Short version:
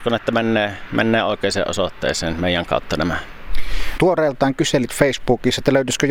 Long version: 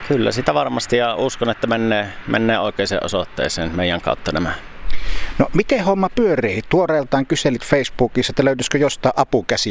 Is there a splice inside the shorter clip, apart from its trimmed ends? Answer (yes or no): yes